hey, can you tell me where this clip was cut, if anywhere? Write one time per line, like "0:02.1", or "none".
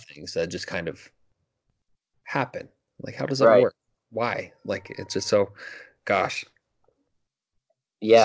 none